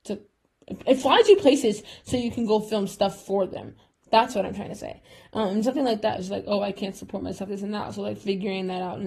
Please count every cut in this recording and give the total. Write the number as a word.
two